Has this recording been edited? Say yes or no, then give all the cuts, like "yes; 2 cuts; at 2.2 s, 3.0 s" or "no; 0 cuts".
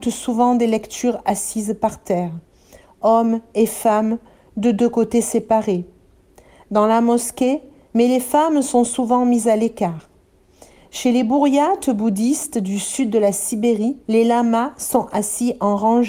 yes; 2 cuts; at 7.9 s, 14.0 s